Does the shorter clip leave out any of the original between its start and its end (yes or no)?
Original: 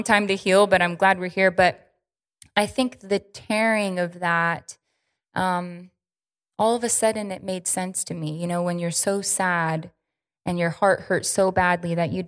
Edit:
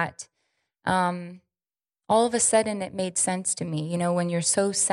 no